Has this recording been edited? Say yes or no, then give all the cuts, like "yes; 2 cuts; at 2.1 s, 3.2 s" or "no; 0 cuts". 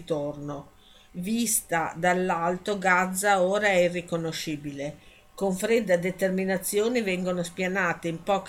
yes; 1 cut; at 1.1 s